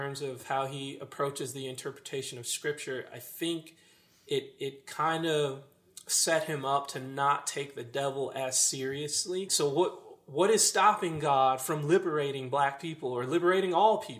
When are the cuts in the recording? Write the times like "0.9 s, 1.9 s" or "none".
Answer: 9.5 s